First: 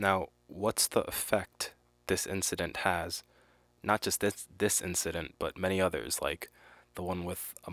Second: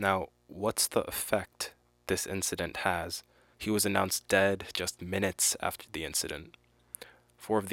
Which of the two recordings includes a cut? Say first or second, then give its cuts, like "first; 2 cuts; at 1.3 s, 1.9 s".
second; 1 cut; at 3.5 s